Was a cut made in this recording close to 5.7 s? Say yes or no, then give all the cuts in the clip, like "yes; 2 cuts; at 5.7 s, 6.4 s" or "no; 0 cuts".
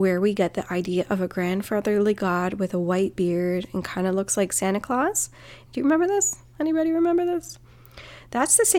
yes; 1 cut; at 5.7 s